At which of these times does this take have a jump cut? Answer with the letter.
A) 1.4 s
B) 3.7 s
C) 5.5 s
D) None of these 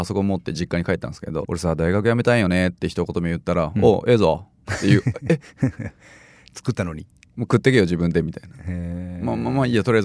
A